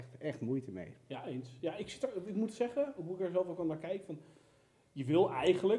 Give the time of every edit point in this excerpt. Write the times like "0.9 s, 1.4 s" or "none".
none